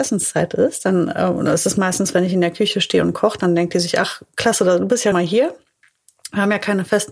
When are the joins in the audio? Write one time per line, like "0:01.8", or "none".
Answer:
0:05.1